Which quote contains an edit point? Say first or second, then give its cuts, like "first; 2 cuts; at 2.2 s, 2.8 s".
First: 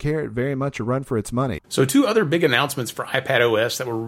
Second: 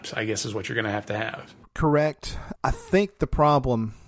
first; 1 cut; at 1.6 s